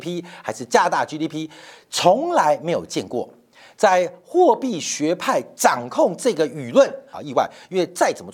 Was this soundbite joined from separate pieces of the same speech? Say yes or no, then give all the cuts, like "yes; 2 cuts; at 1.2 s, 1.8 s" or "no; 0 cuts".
yes; 1 cut; at 7.1 s